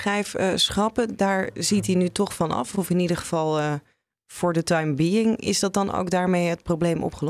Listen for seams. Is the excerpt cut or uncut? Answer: uncut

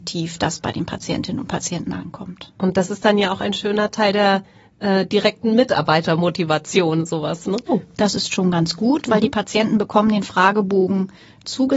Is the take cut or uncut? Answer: cut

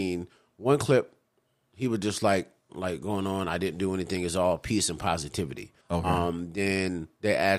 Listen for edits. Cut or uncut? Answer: cut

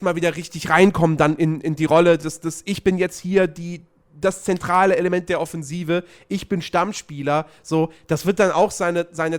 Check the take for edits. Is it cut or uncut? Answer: uncut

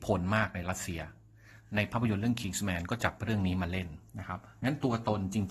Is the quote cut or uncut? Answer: cut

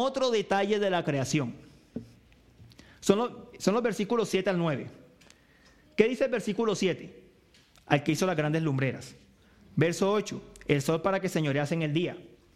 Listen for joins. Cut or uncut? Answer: uncut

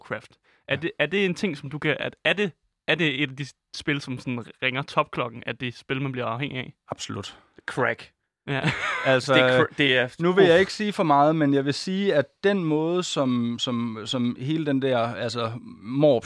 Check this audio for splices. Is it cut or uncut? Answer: uncut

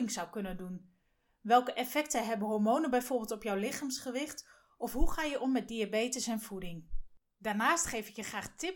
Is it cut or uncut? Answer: uncut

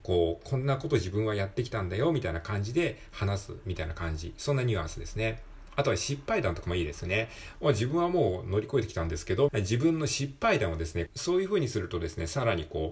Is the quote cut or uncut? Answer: cut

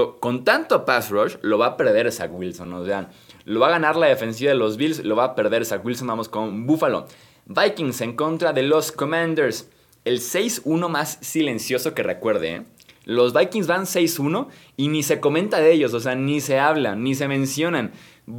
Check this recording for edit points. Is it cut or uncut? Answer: uncut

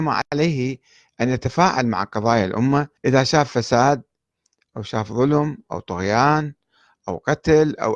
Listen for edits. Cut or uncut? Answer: cut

